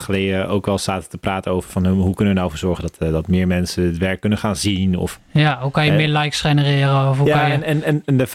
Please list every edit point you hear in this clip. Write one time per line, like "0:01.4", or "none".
none